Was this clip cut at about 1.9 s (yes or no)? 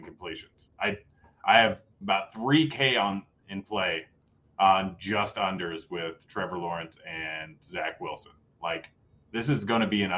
yes